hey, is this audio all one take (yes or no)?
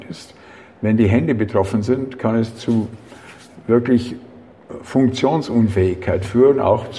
yes